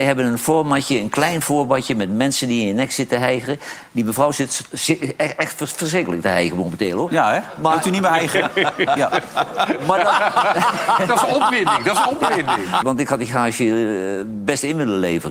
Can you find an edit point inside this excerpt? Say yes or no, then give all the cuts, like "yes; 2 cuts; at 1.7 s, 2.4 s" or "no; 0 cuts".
yes; 2 cuts; at 9.0 s, 12.8 s